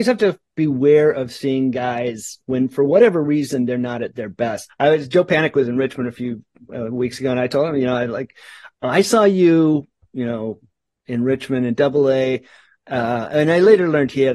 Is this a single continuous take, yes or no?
no